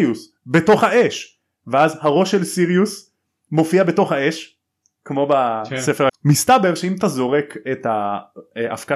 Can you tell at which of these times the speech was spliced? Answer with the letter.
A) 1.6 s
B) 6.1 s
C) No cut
B